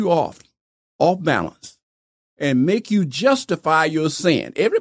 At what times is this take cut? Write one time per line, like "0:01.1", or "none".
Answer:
none